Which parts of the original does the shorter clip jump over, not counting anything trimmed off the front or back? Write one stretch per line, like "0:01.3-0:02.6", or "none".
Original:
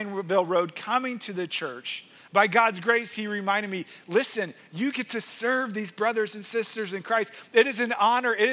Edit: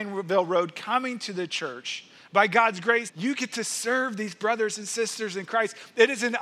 0:03.1-0:04.6

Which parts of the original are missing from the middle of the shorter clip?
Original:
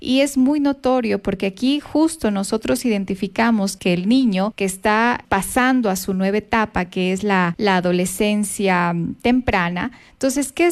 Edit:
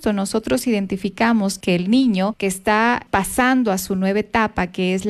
none

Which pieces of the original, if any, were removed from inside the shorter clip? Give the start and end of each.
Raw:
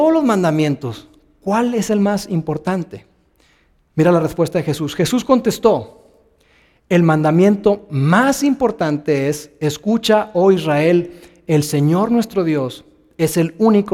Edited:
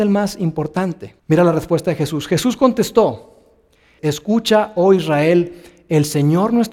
0:03.1-0:03.9
0:06.7-0:09.6

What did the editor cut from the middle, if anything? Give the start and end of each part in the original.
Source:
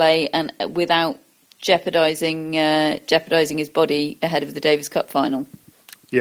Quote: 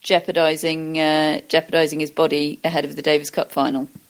none

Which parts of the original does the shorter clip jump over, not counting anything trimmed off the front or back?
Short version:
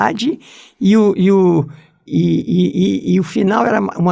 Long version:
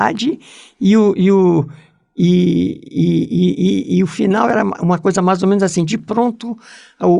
0:02.1-0:02.9

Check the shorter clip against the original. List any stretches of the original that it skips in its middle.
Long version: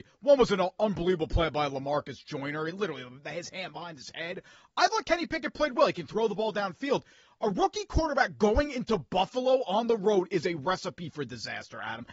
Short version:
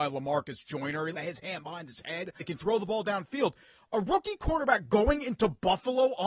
0:02.7-0:03.2
0:04.5-0:05.9

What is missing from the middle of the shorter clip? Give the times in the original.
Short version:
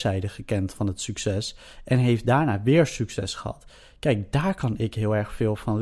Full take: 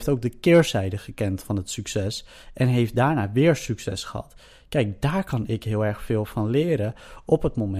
none

